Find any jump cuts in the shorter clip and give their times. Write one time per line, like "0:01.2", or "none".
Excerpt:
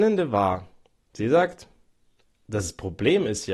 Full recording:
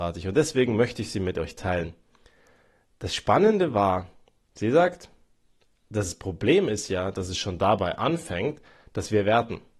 none